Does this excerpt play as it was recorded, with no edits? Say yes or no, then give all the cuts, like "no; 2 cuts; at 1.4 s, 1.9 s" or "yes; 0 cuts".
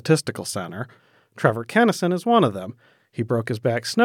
yes; 0 cuts